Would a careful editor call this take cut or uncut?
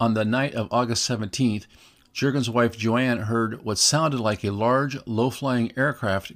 uncut